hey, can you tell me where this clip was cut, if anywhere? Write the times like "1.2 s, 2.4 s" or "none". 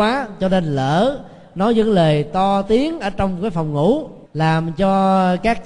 4.3 s